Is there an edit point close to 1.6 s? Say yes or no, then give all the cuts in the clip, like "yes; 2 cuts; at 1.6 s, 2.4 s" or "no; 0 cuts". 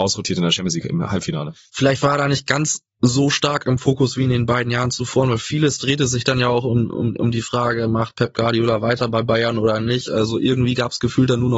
no; 0 cuts